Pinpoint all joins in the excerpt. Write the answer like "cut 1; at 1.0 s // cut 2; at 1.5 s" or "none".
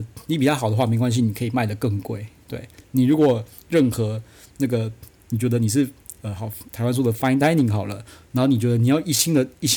cut 1; at 2.8 s // cut 2; at 6.7 s